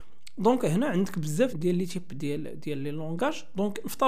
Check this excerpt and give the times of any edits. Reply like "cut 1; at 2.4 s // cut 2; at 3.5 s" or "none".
cut 1; at 1.5 s